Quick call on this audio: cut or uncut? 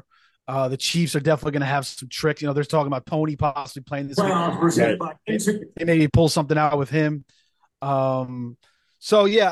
uncut